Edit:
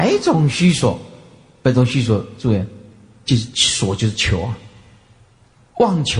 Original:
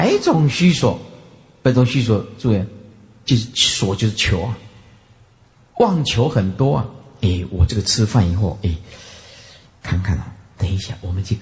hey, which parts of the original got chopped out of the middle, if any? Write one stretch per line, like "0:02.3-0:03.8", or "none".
none